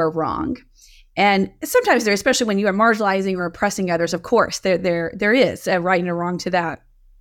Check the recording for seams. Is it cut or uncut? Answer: uncut